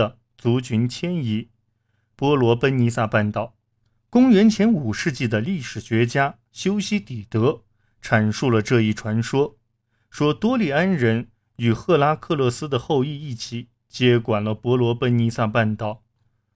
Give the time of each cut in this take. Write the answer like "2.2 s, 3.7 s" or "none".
2.1 s